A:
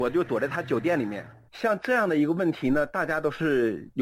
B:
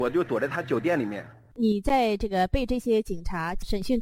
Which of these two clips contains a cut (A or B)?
A